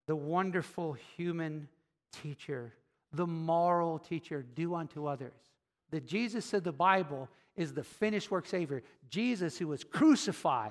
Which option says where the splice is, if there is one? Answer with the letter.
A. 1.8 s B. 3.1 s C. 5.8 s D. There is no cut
C